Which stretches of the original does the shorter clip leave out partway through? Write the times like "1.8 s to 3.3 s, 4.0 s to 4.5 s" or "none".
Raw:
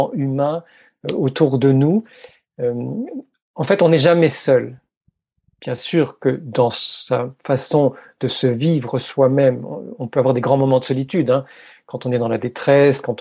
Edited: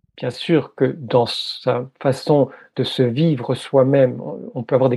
none